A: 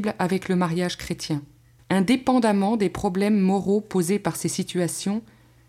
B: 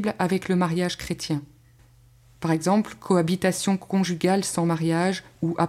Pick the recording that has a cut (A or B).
A